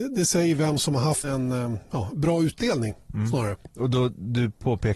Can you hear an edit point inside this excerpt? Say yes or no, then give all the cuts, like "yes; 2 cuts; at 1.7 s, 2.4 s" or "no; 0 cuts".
yes; 2 cuts; at 1.2 s, 3.7 s